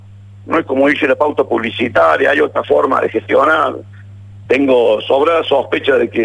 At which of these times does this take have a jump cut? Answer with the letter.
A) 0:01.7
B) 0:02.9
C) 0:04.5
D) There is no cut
C